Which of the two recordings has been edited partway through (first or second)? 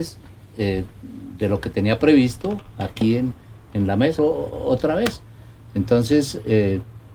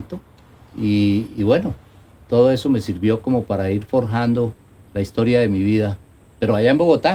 first